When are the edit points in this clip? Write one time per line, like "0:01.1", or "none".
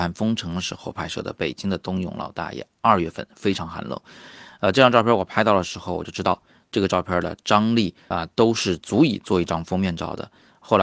0:08.1

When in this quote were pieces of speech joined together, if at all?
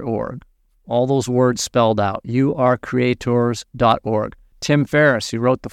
0:04.5

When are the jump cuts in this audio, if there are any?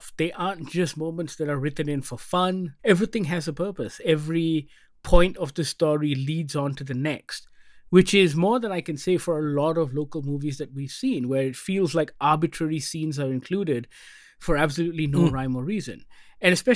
0:02.8

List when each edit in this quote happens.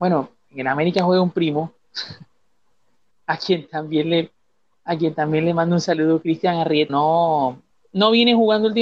0:06.9

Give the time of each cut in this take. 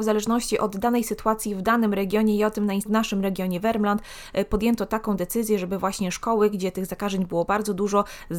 0:02.9

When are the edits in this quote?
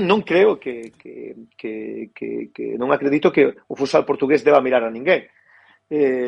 none

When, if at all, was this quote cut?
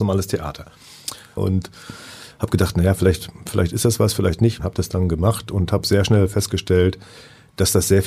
0:01.4
0:04.6

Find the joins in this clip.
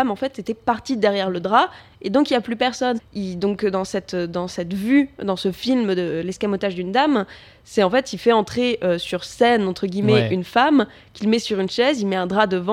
0:03.0

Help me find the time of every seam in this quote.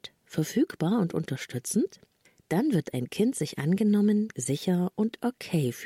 0:04.3

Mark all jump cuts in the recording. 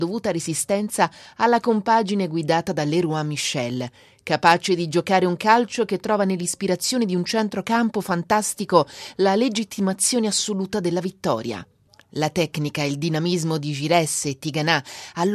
none

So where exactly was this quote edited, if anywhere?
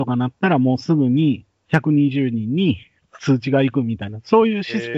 none

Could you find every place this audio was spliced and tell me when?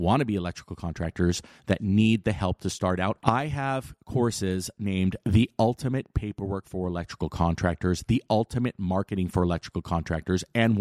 0:03.2

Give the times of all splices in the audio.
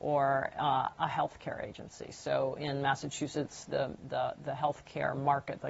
0:04.1

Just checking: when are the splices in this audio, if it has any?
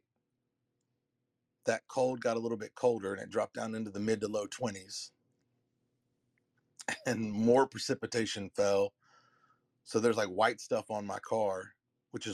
none

